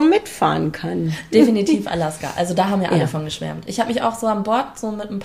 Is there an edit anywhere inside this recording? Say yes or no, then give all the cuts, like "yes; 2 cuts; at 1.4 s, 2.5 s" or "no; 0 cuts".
no; 0 cuts